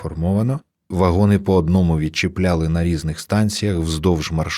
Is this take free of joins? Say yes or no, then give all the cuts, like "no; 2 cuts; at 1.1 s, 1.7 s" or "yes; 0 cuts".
no; 1 cut; at 0.9 s